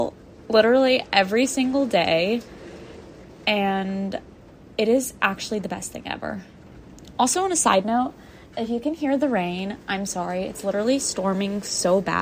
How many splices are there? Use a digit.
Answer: 0